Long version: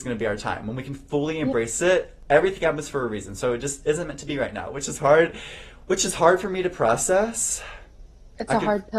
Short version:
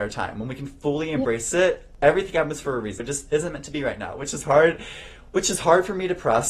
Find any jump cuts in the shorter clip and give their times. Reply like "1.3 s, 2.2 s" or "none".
3.0 s